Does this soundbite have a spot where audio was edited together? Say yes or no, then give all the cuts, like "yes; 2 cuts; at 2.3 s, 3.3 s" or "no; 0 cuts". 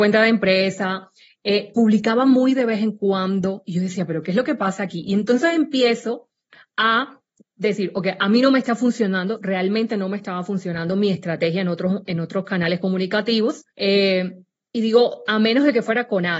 yes; 1 cut; at 13.7 s